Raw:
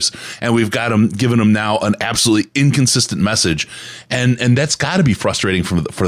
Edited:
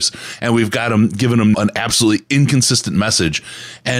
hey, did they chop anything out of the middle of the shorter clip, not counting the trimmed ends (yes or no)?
yes